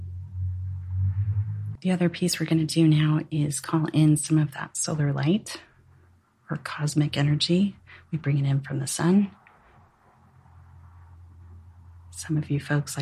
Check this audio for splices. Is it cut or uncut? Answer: cut